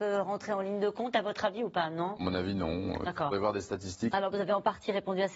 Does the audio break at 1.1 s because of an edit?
no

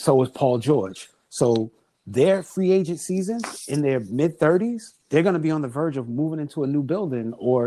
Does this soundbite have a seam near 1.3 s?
no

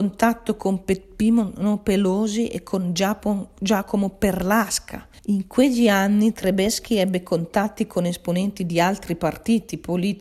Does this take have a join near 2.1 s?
no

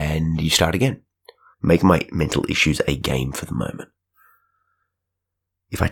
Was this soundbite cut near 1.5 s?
yes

